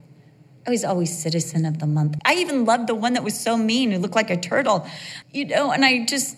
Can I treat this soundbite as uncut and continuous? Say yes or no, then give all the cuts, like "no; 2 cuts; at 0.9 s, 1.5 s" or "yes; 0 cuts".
no; 2 cuts; at 2.2 s, 5.2 s